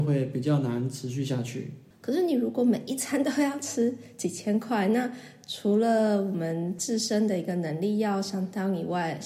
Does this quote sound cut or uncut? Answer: cut